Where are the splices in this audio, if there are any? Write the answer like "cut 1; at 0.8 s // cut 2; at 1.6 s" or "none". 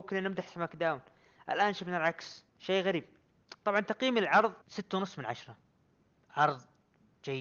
cut 1; at 2.5 s // cut 2; at 4.6 s